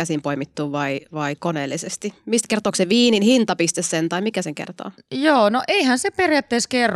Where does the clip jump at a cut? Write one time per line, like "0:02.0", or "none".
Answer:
none